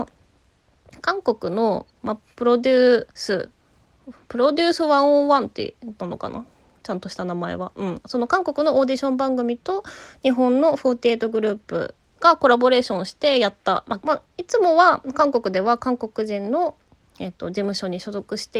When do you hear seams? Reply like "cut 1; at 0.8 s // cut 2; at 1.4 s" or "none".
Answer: cut 1; at 3.1 s // cut 2; at 14.0 s